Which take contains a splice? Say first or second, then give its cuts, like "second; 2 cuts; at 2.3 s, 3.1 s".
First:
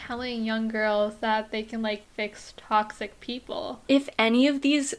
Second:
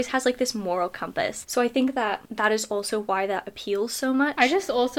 second; 1 cut; at 1.4 s